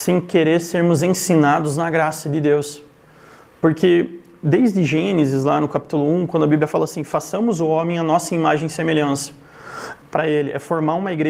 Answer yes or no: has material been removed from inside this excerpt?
yes